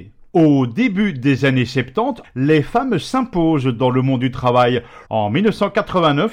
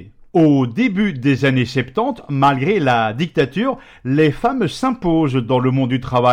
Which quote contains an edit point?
first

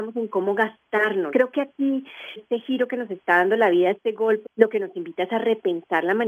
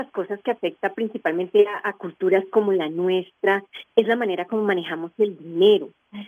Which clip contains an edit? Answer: first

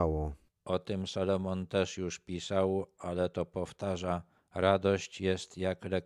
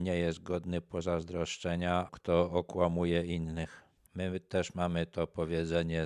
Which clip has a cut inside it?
second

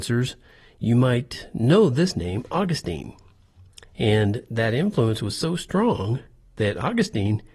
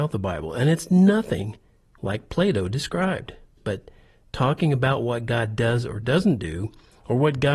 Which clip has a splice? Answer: second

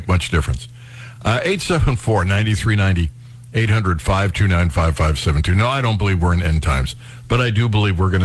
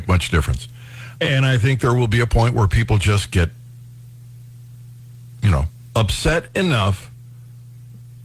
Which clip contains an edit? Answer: second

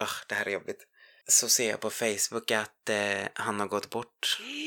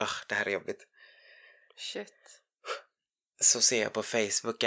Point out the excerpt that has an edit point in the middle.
first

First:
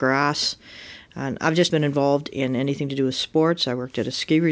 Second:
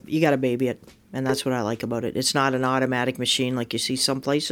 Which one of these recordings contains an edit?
first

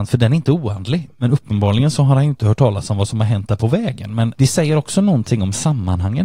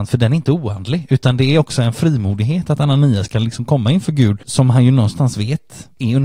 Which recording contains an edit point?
first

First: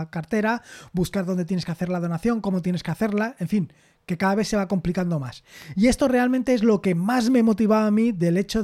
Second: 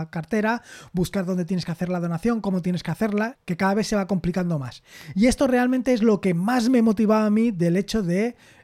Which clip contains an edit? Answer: second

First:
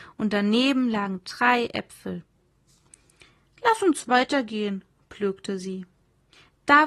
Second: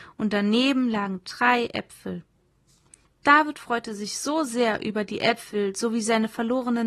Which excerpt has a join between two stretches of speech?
second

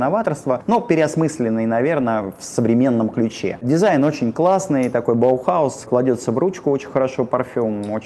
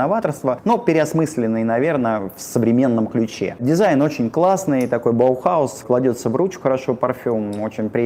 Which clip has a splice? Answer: second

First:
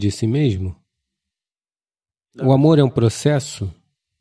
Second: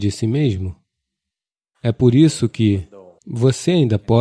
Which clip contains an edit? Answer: second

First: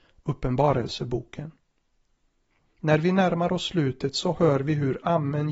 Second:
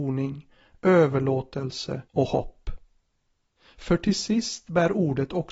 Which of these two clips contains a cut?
second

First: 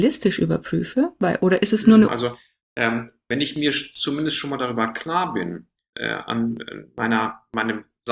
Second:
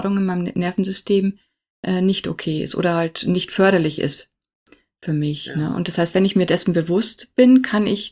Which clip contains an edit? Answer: first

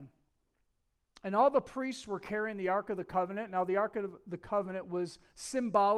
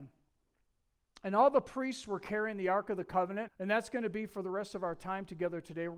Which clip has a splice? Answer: second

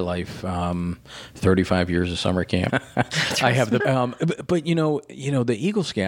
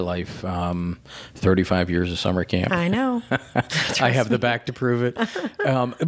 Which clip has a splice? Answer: first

